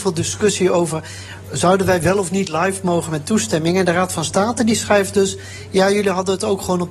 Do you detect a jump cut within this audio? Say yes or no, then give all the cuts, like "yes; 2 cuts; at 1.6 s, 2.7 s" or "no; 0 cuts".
no; 0 cuts